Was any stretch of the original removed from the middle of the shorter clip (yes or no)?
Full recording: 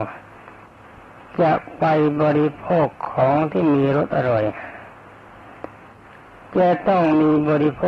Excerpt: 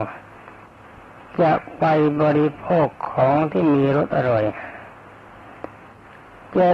no